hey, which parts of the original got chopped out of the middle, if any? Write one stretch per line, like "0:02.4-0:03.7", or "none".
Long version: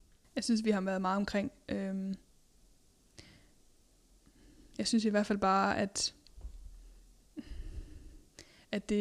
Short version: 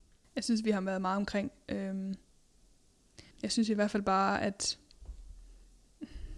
0:03.3-0:04.7

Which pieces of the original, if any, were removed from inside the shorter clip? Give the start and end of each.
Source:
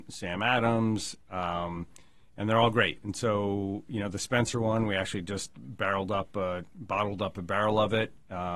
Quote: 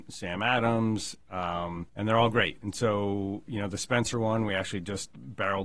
0:01.9-0:02.3

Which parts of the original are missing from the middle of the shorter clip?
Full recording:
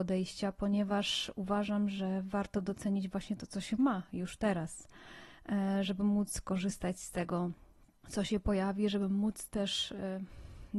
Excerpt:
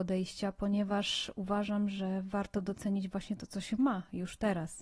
none

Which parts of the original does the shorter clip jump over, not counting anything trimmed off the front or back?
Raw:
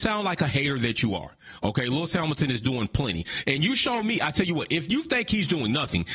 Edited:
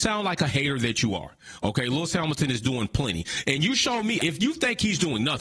0:04.2-0:04.7

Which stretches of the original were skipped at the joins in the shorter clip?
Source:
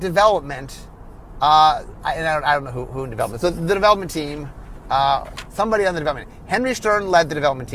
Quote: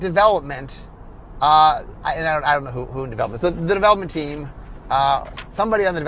none

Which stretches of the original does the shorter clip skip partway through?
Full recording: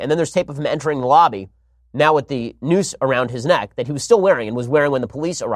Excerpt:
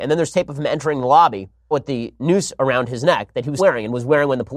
0:01.7-0:02.1
0:04.0-0:04.2

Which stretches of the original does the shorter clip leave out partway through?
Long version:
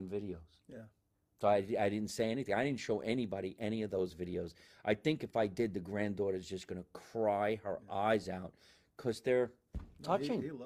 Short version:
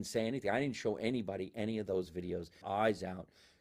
0:04.7-0:07.9

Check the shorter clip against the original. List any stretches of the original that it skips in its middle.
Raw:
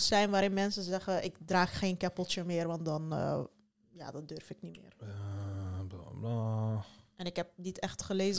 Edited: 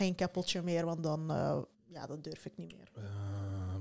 0:03.6-0:03.8

